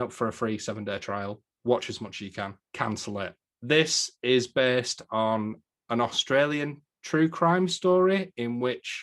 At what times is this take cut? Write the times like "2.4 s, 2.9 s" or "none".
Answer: none